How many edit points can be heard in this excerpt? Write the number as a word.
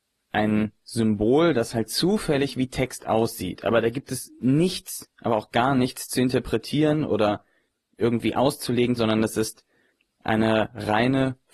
one